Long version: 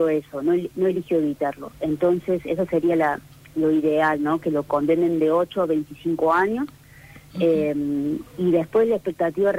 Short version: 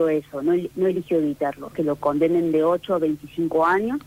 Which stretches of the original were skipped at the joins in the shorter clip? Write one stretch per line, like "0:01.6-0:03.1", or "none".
0:01.7-0:04.4

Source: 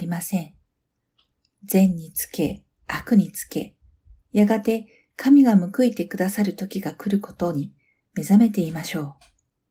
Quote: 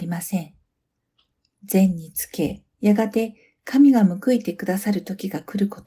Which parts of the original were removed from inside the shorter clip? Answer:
0:02.7-0:04.2

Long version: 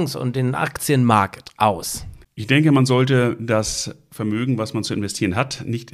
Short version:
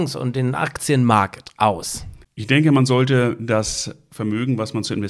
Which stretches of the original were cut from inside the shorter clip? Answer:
none

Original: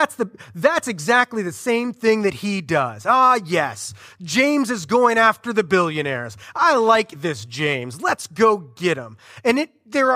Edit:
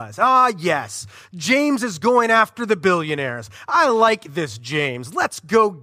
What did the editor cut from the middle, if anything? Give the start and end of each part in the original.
none

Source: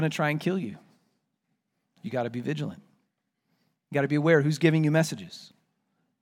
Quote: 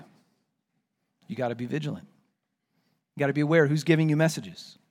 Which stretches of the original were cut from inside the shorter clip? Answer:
none

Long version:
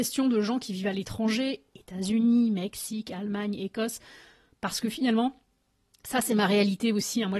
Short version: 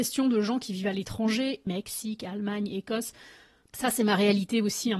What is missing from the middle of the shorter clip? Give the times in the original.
0:01.7-0:02.5
0:04.5-0:06.0

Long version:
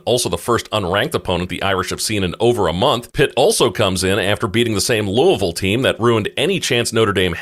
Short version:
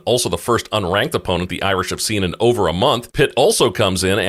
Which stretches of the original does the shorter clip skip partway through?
none

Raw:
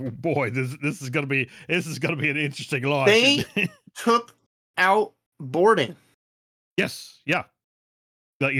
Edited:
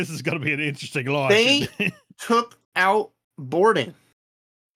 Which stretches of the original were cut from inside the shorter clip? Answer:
0:04.4-0:04.7

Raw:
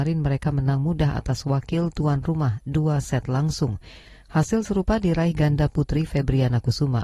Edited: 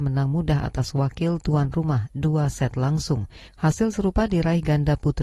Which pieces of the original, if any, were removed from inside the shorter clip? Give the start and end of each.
0:04.0-0:04.2

